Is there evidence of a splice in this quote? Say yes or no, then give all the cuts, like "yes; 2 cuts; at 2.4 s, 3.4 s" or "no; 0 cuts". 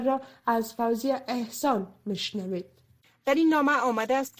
no; 0 cuts